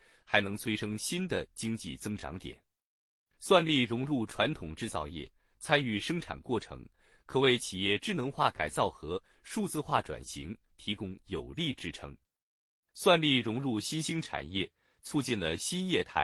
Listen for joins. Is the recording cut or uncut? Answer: uncut